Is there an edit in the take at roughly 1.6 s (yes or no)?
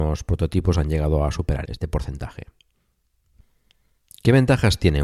yes